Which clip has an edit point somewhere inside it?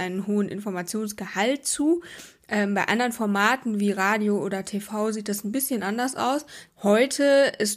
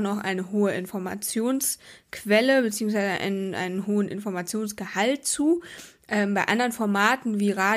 first; 1 cut; at 6.7 s

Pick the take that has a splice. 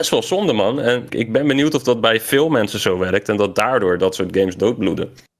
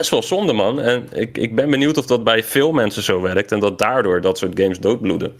first; 1 cut; at 1.1 s

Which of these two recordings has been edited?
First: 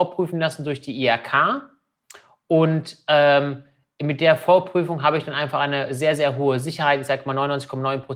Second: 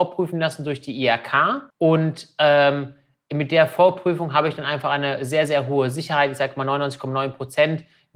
second; 1 cut; at 1.7 s

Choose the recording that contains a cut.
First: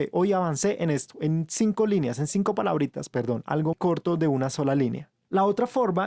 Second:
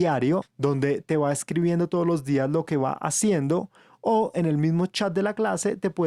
first; 1 cut; at 3.7 s

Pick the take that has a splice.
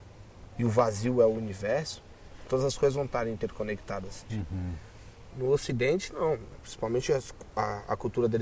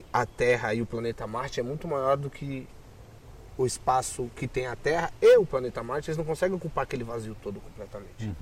first; 2 cuts; at 4.3 s, 5.3 s

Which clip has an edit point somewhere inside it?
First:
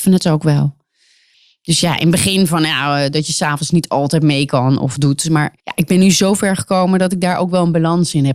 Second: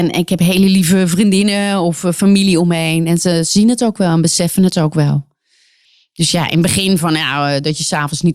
first; 1 cut; at 5.6 s

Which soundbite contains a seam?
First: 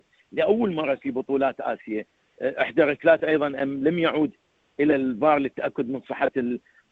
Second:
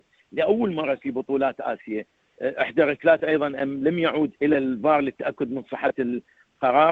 second; 1 cut; at 4.4 s

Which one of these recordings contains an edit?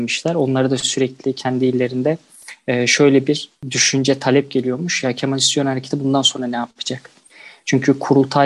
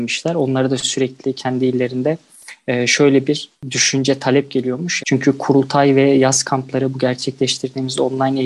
second; 1 cut; at 5.0 s

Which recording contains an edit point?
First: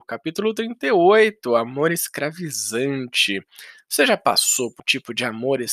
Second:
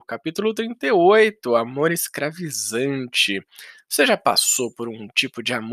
first; 1 cut; at 4.8 s

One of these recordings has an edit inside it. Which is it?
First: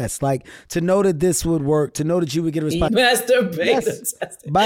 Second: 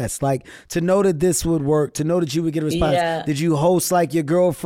first; 1 cut; at 2.9 s

